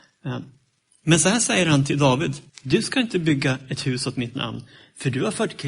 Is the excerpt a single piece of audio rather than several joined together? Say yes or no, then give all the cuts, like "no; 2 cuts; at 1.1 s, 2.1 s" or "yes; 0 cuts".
no; 1 cut; at 2.5 s